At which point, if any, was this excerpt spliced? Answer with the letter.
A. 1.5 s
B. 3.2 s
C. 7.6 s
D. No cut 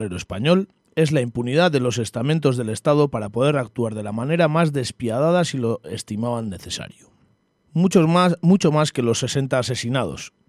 C